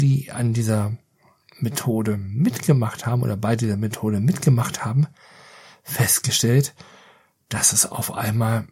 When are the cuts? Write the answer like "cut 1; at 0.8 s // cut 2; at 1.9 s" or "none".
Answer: none